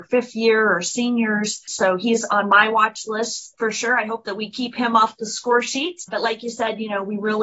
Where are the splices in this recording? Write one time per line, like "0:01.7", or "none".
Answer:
0:01.7